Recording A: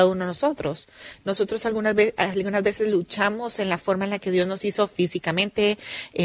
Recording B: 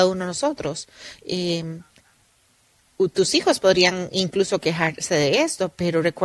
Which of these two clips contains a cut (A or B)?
B